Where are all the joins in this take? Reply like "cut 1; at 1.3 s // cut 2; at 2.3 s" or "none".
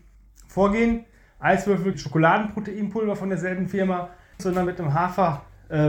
cut 1; at 1.9 s // cut 2; at 4.4 s